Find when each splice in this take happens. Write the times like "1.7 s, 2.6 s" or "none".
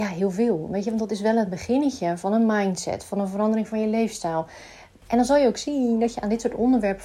5.0 s